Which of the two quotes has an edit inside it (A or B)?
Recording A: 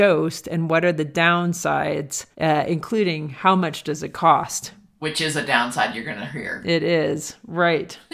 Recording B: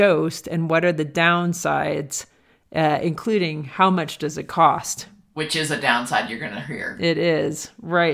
A